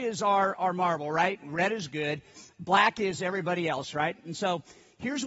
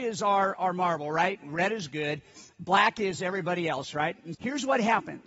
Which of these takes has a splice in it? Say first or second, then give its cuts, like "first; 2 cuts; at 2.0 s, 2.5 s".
second; 1 cut; at 4.3 s